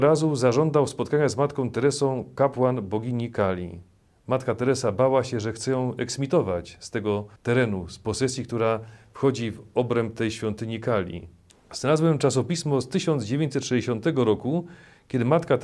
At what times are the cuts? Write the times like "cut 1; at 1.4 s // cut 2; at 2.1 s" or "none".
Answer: cut 1; at 7.4 s // cut 2; at 11.5 s

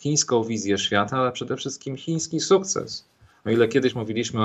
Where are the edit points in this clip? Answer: none

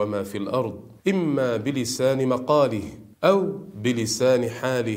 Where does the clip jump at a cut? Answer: cut 1; at 1.0 s // cut 2; at 3.1 s

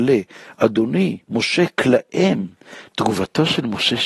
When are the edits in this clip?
none

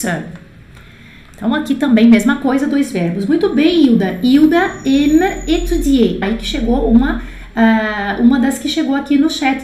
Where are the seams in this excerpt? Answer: cut 1; at 6.2 s

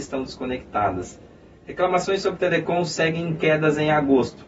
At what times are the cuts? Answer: none

